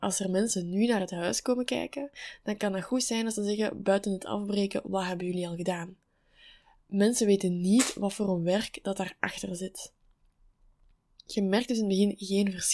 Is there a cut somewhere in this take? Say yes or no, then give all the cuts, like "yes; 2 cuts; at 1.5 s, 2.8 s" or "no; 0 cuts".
no; 0 cuts